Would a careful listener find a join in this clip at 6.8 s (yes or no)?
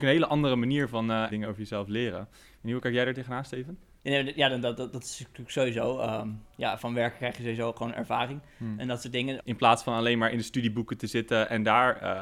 yes